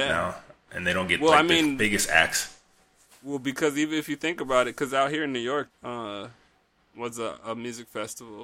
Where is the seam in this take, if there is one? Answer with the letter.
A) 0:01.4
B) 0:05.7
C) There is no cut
B